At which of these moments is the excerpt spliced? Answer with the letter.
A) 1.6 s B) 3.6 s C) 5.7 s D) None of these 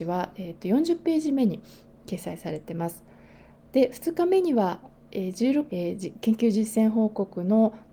C